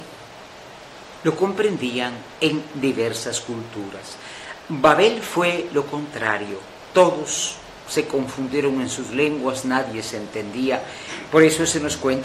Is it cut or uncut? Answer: cut